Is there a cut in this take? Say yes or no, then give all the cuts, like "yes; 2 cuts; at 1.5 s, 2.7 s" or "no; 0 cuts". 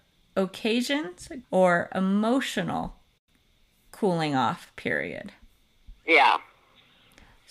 yes; 1 cut; at 1.4 s